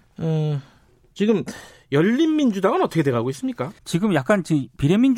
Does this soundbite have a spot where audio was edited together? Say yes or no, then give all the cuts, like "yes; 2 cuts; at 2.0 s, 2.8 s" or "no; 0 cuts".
yes; 1 cut; at 3.8 s